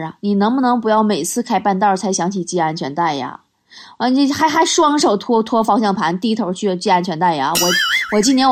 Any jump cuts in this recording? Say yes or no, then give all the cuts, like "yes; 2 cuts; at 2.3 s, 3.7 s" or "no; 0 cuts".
no; 0 cuts